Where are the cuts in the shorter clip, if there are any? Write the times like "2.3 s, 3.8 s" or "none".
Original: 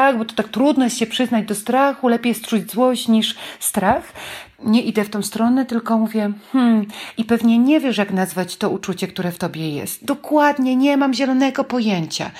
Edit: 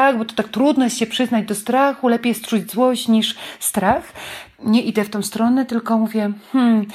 none